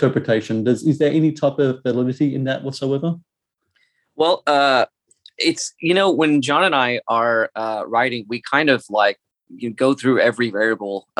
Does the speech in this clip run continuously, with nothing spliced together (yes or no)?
yes